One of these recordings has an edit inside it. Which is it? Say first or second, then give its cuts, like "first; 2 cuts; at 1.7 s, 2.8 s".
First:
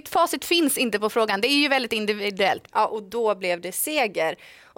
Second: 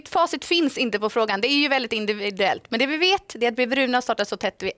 first; 1 cut; at 2.7 s